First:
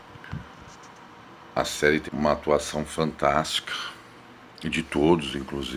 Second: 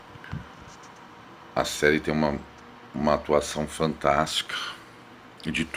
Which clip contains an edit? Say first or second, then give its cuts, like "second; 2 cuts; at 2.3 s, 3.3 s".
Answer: first; 1 cut; at 2.1 s